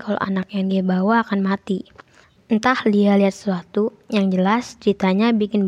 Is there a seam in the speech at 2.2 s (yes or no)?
no